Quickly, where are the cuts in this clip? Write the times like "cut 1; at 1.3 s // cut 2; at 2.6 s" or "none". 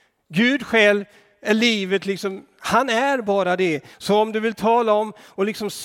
cut 1; at 3.9 s